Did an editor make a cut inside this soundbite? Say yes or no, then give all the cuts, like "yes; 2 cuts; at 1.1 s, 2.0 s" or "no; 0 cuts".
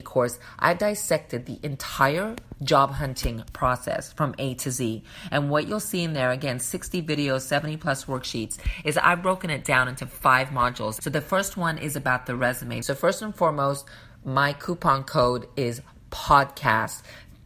yes; 2 cuts; at 11.0 s, 12.8 s